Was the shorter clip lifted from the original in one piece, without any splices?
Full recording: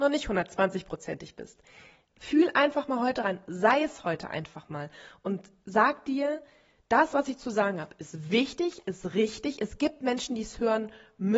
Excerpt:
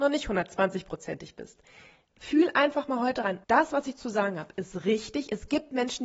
no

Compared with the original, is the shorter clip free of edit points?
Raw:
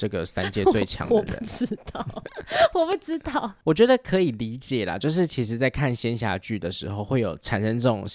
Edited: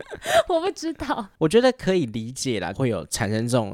no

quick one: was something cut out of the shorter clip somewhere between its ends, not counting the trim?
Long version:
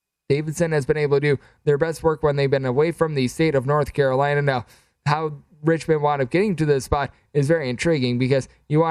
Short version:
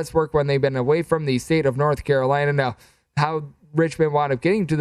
no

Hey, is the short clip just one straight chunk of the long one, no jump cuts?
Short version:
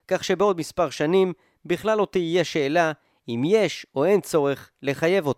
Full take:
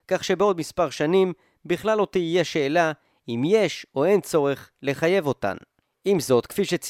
yes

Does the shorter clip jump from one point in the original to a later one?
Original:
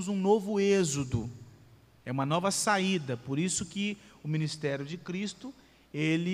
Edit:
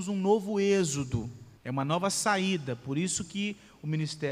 yes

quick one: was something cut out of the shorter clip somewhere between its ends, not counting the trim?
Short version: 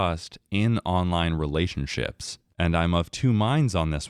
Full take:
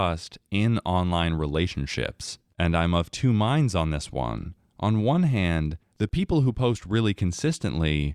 no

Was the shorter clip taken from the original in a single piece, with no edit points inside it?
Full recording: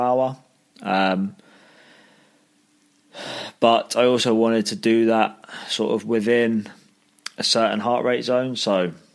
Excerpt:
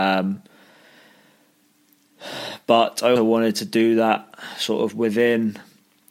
no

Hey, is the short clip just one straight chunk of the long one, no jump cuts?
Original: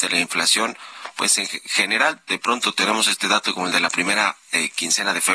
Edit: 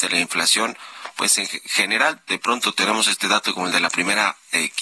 yes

